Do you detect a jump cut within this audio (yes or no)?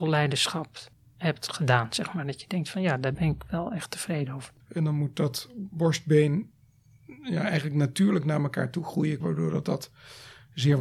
yes